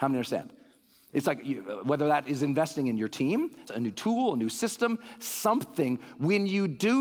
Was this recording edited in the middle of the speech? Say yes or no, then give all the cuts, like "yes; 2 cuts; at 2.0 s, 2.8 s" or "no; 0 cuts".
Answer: yes; 1 cut; at 3.7 s